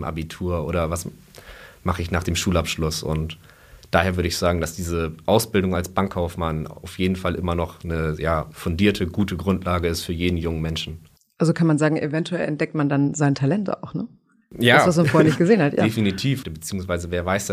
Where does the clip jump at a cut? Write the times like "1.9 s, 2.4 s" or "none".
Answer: 16.4 s